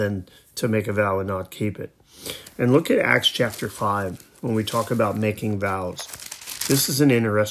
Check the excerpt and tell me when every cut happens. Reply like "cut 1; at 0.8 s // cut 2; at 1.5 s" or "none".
none